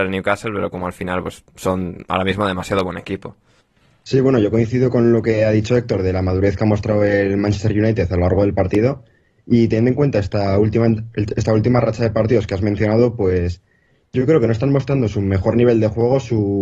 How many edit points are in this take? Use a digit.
0